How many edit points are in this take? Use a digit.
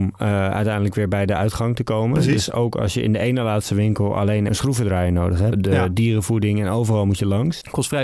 2